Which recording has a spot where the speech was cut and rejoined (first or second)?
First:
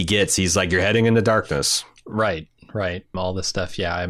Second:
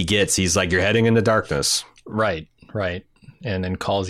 first